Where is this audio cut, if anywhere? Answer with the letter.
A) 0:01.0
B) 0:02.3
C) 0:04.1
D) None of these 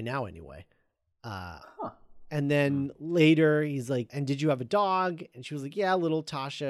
C